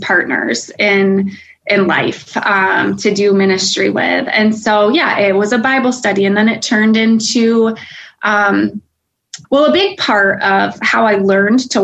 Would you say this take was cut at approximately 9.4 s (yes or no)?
yes